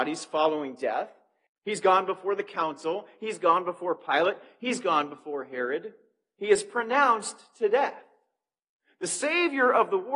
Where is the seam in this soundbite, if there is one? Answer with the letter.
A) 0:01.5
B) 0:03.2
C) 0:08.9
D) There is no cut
A